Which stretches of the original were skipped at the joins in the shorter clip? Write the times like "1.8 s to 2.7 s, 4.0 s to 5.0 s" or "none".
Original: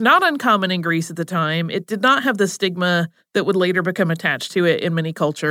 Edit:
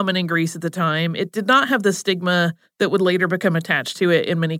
none